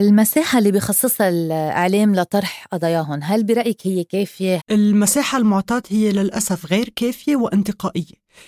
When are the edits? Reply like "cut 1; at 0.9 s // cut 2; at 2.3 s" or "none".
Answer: cut 1; at 4.6 s

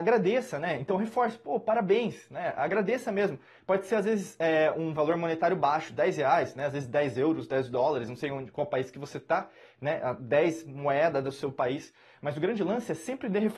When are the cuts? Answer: none

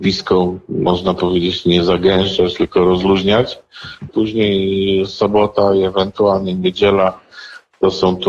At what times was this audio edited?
cut 1; at 4.1 s

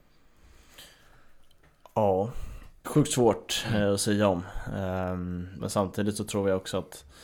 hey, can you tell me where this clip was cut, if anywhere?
cut 1; at 2.8 s // cut 2; at 5.6 s

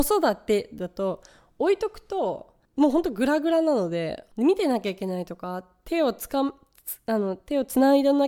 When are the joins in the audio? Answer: cut 1; at 2.6 s // cut 2; at 4.3 s

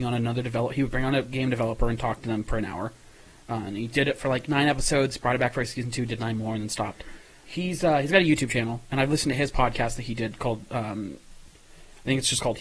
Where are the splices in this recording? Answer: cut 1; at 7.4 s

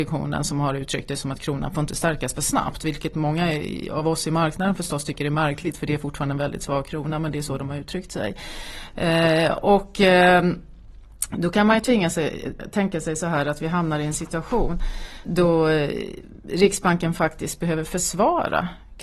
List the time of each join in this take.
cut 1; at 12.6 s // cut 2; at 15.2 s

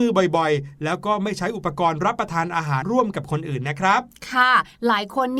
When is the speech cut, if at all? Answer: cut 1; at 2.8 s

